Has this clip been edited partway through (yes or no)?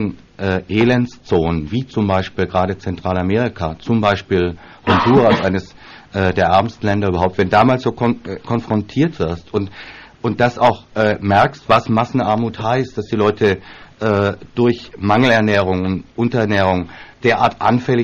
yes